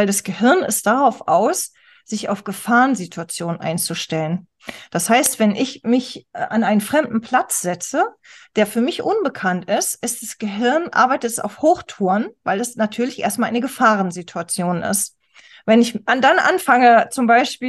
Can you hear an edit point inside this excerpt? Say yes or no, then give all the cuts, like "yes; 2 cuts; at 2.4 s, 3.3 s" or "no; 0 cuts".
no; 0 cuts